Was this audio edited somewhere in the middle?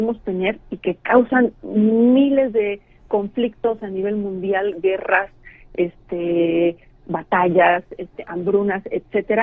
no; 0 cuts

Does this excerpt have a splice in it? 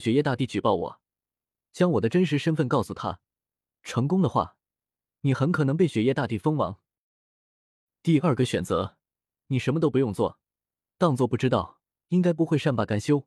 yes; 1 cut; at 12.1 s

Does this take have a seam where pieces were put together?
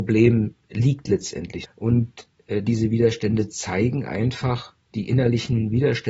yes; 1 cut; at 1.6 s

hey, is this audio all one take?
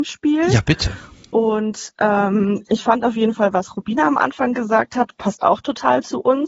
yes; 0 cuts

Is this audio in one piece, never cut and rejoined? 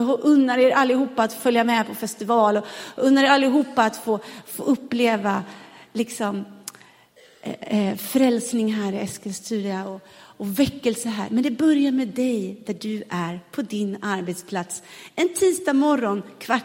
yes; 0 cuts

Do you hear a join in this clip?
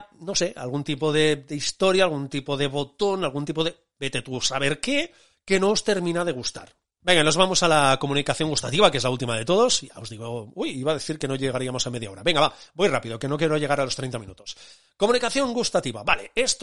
no; 0 cuts

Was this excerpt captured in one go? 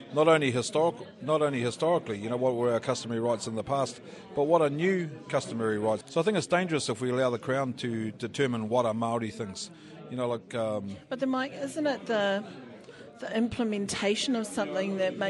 no; 1 cut; at 6.0 s

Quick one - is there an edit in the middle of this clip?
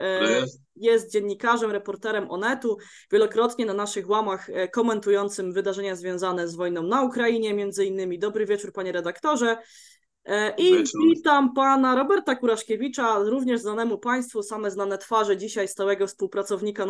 no; 0 cuts

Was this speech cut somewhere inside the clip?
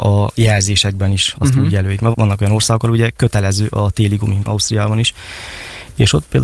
yes; 2 cuts; at 2.1 s, 4.4 s

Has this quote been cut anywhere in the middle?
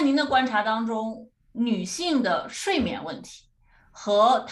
no; 0 cuts

